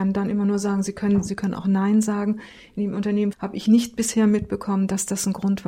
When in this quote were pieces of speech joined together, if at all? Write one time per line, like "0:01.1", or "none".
0:01.3
0:03.3